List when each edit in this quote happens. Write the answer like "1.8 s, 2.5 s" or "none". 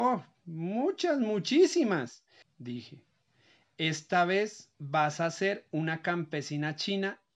2.4 s, 4.7 s